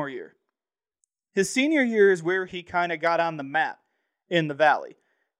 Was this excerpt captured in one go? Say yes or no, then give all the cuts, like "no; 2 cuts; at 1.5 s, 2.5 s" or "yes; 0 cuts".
yes; 0 cuts